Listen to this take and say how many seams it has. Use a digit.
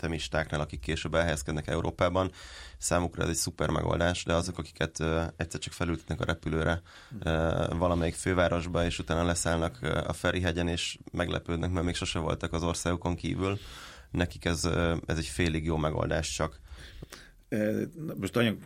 0